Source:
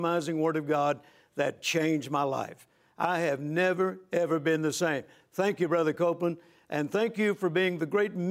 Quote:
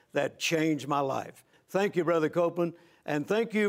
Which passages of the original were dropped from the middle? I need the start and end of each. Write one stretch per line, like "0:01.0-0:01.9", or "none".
0:02.8-0:05.2